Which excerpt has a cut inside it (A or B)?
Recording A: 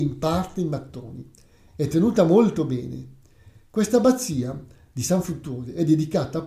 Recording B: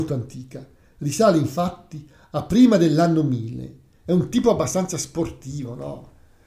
B